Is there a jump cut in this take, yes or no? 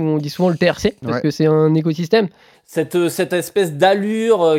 yes